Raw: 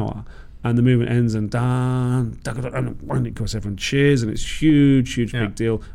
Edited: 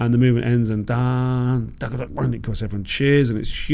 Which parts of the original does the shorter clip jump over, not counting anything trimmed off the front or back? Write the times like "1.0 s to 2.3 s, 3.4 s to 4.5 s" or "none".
2.7 s to 3.0 s